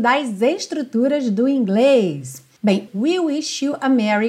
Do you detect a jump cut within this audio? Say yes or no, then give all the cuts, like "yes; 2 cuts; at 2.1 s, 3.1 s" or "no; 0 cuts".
yes; 1 cut; at 2.9 s